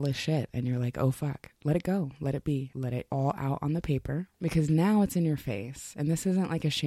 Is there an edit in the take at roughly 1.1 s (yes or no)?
no